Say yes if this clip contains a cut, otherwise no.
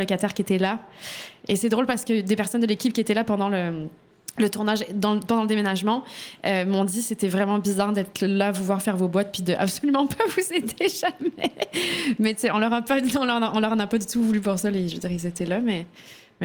no